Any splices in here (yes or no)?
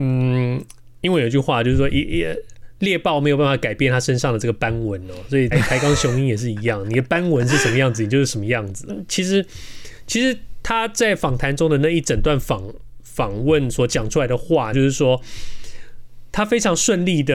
yes